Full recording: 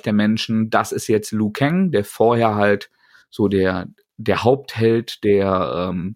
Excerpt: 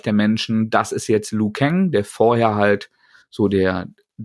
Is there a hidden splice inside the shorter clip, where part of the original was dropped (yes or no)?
no